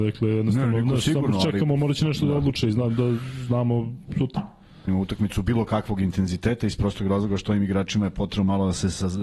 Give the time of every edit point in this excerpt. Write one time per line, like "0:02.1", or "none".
0:04.9

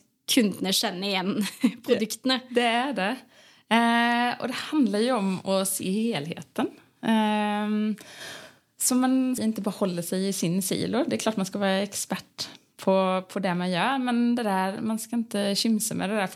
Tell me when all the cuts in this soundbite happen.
0:09.4

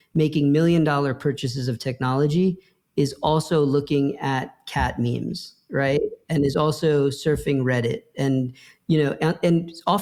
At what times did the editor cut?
none

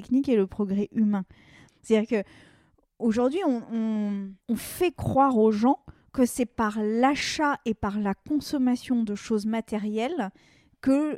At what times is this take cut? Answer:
0:01.7
0:04.4

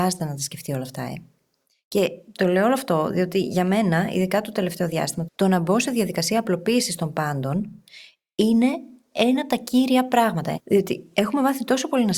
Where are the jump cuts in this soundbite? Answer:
0:05.3
0:10.6

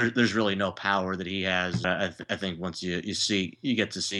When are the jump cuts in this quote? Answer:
0:01.8

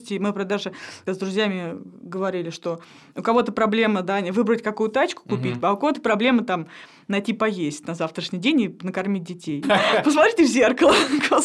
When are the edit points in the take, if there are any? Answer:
0:01.1
0:05.6
0:09.6

